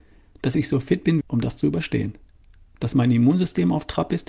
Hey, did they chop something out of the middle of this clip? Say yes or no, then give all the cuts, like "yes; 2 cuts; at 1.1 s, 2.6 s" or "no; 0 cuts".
yes; 1 cut; at 1.2 s